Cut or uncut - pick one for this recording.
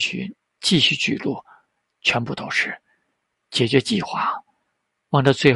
uncut